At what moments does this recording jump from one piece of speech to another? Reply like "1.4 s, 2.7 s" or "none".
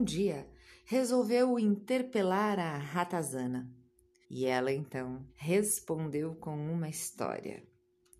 4.2 s, 5.3 s